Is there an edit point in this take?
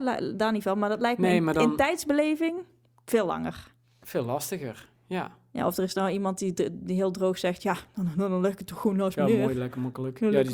no; 0 cuts

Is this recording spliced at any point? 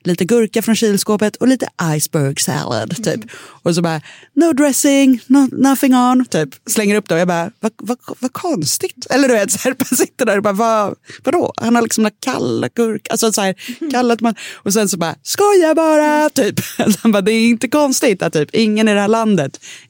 yes; 1 cut; at 3.3 s

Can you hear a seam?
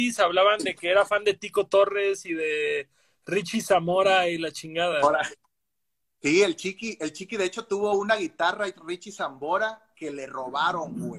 no; 0 cuts

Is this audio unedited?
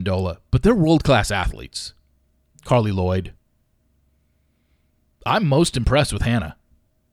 yes; 0 cuts

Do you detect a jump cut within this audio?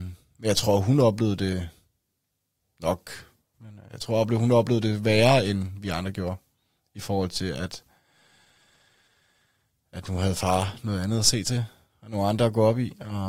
yes; 1 cut; at 3.5 s

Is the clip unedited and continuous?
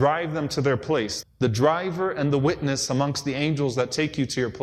no; 1 cut; at 1.2 s

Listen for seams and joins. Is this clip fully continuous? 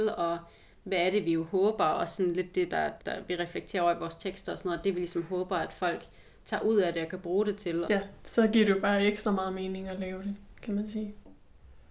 no; 2 cuts; at 3.0 s, 7.8 s

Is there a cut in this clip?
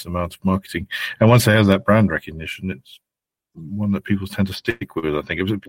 no; 0 cuts

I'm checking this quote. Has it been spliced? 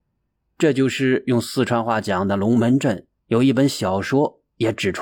yes; 1 cut; at 3.2 s

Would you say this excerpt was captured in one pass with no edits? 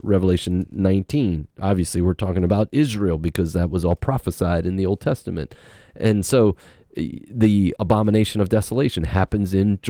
no; 1 cut; at 7.8 s

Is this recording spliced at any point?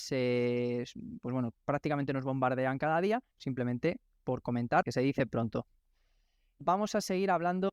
yes; 3 cuts; at 3.3 s, 4.8 s, 6.6 s

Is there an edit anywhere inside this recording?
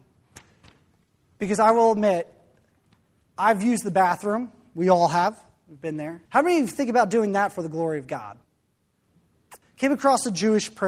yes; 2 cuts; at 6.3 s, 9.6 s

